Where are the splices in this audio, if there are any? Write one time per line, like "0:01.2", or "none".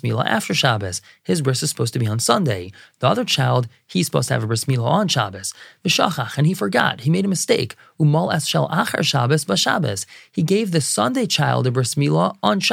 none